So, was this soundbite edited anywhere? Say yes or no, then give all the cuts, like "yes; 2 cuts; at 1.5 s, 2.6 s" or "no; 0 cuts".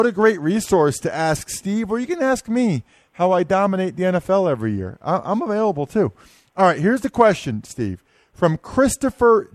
no; 0 cuts